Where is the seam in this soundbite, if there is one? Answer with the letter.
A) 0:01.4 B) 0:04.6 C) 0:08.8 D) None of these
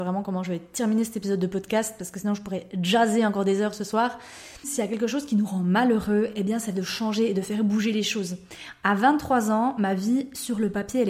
B